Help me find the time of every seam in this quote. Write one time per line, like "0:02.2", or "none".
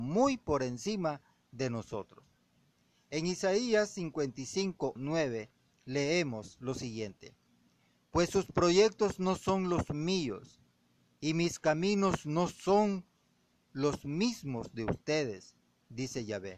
0:05.0